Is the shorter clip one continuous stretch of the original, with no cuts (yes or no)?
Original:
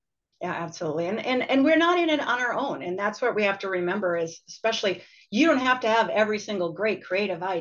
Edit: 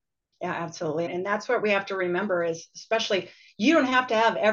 no